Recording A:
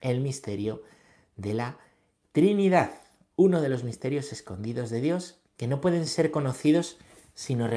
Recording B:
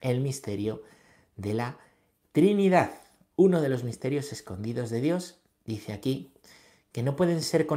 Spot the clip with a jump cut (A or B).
A